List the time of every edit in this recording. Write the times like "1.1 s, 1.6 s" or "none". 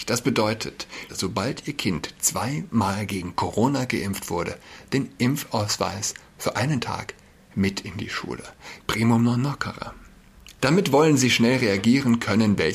1.1 s, 8.8 s, 10.6 s